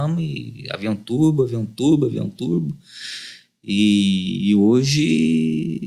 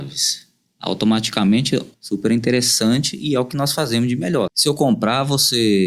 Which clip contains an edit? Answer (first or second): second